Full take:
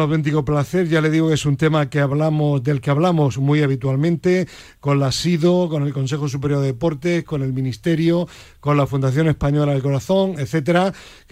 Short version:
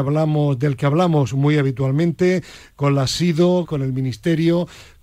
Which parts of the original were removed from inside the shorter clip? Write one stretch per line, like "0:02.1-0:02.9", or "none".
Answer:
0:05.7-0:07.2